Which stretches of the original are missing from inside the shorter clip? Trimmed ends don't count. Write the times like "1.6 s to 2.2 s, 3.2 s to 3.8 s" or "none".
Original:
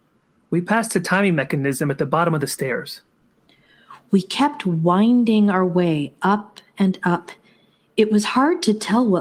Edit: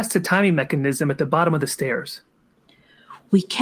none